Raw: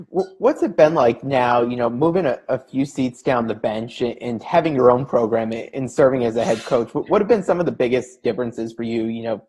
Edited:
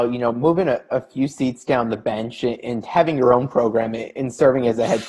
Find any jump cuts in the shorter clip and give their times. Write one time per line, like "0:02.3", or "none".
none